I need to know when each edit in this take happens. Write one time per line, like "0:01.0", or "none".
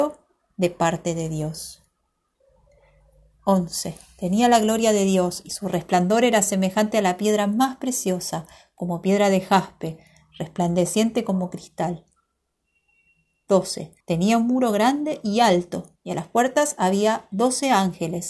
0:14.0
0:16.0